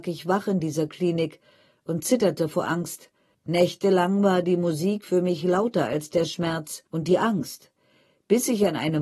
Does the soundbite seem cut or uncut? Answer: cut